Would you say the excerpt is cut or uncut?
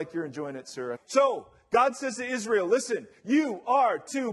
cut